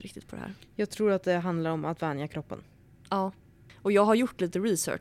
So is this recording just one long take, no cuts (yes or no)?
yes